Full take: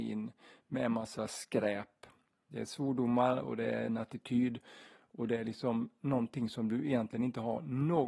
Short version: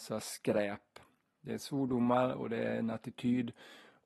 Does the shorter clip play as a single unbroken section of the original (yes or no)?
yes